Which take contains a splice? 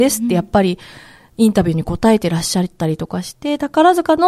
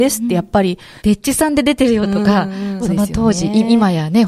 second; 2 cuts; at 1.0 s, 2.8 s

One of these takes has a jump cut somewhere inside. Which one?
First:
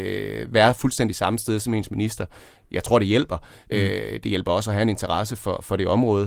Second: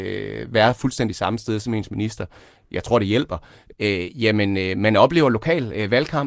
second; 1 cut; at 3.7 s

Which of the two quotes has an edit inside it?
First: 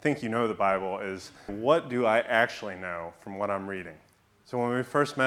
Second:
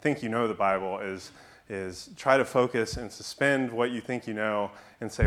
first; 1 cut; at 1.5 s

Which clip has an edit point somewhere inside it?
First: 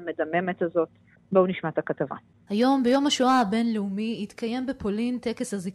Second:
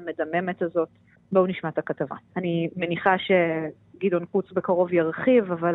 second; 1 cut; at 2.3 s

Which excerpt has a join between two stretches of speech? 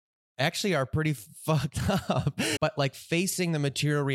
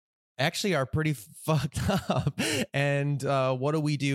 first; 1 cut; at 2.6 s

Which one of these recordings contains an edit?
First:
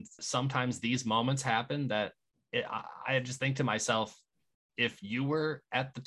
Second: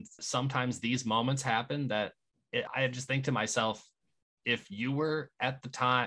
second; 1 cut; at 2.7 s

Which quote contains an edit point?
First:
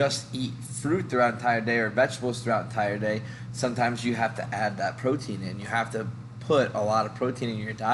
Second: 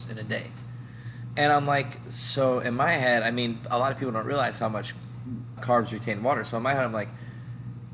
second; 1 cut; at 5.6 s

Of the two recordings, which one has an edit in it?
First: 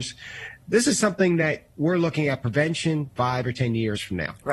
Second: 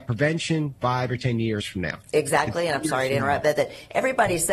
second; 1 cut; at 2.1 s

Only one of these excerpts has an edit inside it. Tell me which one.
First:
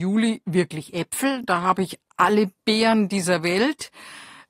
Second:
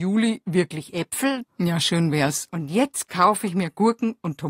second; 2 cuts; at 1.4 s, 2.5 s

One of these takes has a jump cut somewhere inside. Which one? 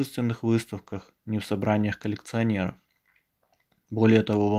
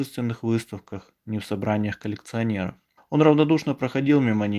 second; 1 cut; at 3.0 s

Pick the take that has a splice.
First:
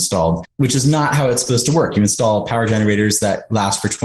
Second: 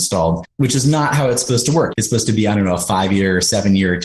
second; 1 cut; at 1.9 s

